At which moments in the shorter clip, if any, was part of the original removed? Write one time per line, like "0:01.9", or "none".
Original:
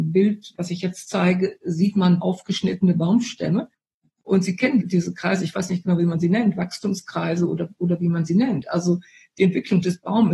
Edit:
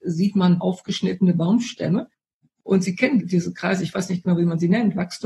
none